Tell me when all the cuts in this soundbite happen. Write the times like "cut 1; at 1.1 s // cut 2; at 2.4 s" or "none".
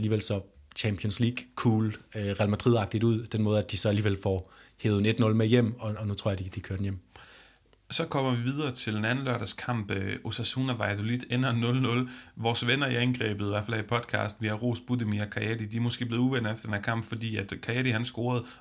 none